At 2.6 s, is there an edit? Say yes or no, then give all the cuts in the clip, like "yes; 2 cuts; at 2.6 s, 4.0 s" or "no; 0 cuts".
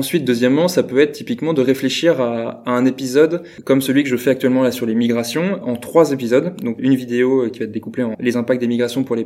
no; 3 cuts; at 5.6 s, 6.8 s, 8.1 s